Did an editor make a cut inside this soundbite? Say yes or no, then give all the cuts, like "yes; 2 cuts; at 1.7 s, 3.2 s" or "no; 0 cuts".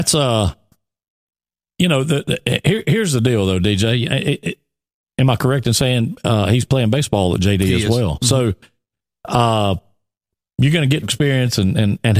yes; 1 cut; at 11.0 s